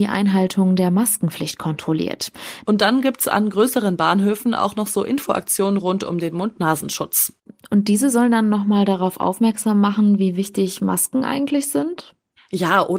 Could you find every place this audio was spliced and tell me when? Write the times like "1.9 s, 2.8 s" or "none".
2.7 s